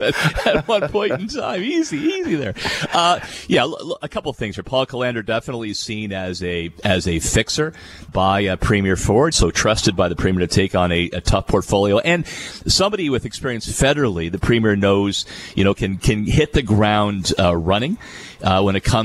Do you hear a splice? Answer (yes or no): yes